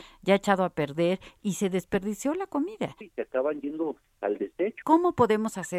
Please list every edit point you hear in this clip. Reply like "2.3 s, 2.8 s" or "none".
3.0 s, 4.8 s